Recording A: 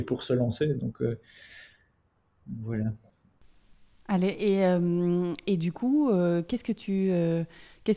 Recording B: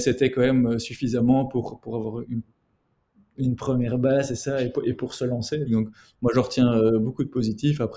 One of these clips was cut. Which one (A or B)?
B